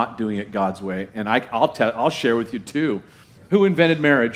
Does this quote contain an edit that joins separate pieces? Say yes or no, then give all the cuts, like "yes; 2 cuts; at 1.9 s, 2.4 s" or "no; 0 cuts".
yes; 1 cut; at 3.3 s